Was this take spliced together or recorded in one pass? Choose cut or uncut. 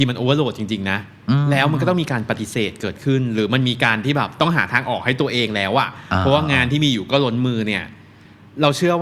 uncut